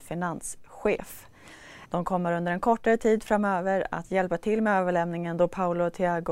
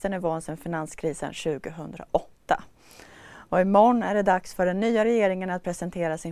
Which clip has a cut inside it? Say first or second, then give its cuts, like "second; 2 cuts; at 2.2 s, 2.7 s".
first; 1 cut; at 1.9 s